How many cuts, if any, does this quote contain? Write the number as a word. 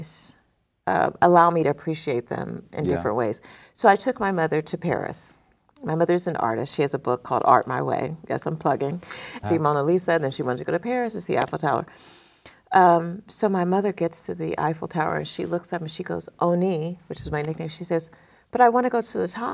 one